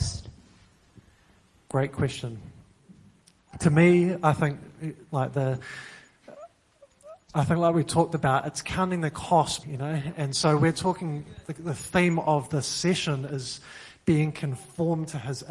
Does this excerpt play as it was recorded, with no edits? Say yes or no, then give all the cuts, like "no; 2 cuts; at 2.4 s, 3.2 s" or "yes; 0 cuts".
no; 1 cut; at 9.6 s